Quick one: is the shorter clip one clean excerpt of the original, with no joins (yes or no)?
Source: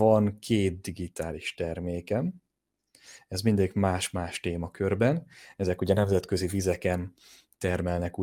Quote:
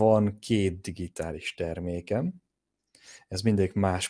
yes